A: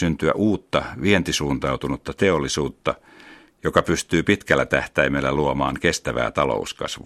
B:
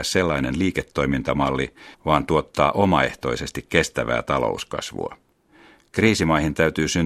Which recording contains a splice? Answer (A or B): B